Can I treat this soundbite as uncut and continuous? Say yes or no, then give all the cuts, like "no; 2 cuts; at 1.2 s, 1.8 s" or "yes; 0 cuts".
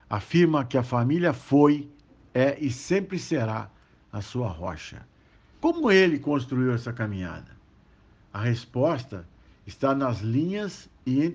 no; 1 cut; at 5.5 s